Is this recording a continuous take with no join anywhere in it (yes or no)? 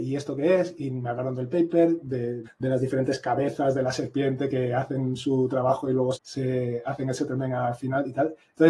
no